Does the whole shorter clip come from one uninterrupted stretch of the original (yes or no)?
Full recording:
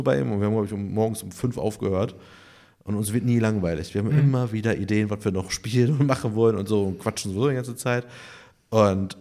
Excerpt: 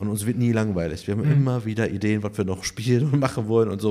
yes